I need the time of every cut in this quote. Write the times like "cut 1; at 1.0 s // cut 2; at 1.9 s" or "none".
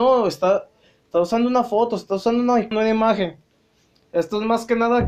cut 1; at 2.7 s